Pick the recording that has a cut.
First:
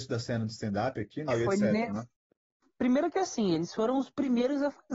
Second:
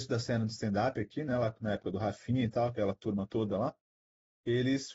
first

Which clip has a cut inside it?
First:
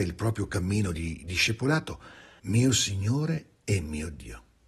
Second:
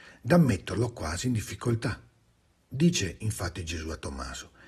first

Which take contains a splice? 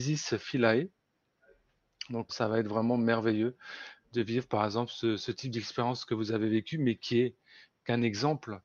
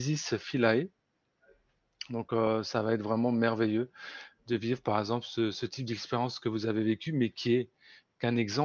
first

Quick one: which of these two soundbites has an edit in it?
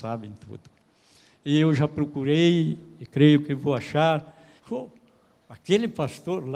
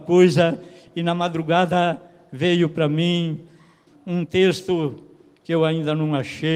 first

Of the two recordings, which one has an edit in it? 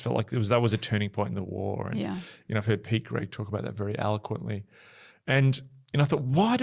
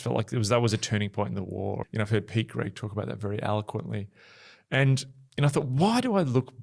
second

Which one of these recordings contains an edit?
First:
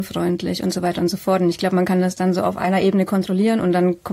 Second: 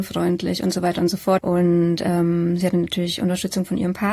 second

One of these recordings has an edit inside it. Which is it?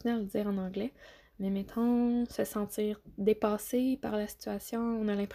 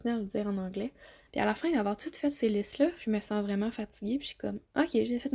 second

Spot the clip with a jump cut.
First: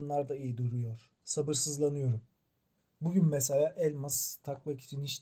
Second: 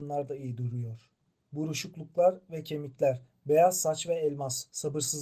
first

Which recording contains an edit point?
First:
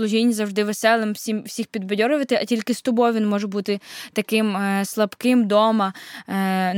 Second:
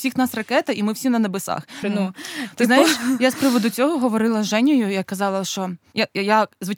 second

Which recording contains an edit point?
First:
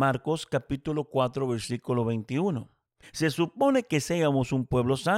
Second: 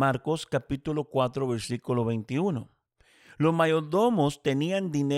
first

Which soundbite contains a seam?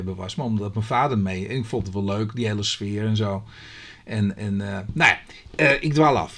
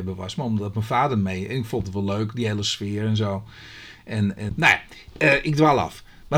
second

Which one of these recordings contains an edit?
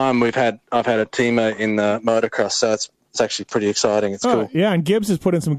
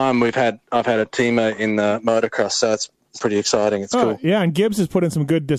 second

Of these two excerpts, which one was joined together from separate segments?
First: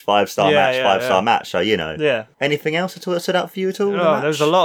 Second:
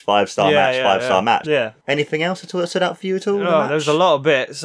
second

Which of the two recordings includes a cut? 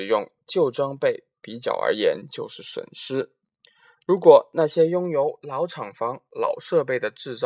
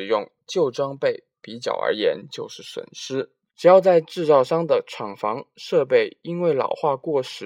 second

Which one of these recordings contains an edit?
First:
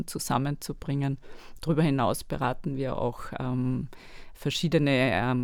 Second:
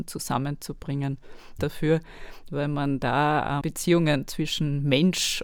second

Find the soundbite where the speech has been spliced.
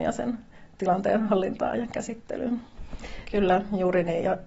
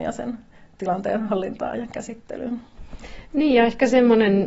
first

